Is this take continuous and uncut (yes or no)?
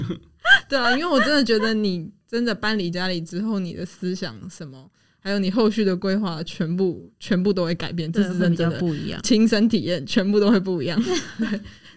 yes